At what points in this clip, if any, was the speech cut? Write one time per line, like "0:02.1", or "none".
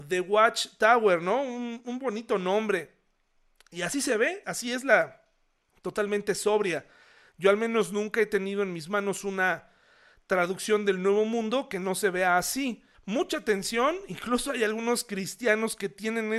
0:04.4
0:12.9